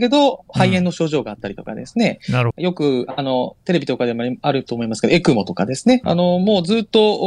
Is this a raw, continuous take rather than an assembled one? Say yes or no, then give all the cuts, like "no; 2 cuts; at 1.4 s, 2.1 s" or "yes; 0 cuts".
no; 2 cuts; at 2.5 s, 6.0 s